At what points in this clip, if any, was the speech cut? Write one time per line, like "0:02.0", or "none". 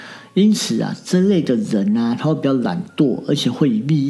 none